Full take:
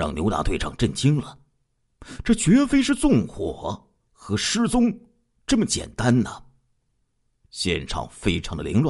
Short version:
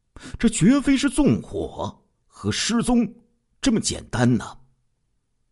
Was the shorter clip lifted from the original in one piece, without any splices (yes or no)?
yes